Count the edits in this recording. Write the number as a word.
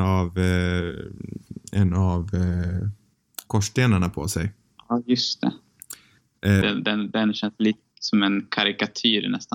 two